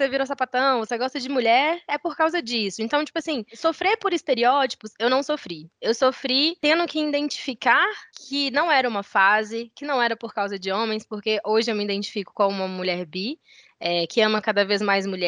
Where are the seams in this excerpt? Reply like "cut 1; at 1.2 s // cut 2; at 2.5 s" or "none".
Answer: none